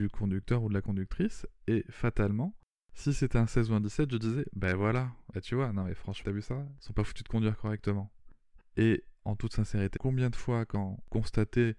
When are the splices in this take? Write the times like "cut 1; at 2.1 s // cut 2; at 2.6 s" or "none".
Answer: cut 1; at 6.2 s // cut 2; at 8.6 s // cut 3; at 10.0 s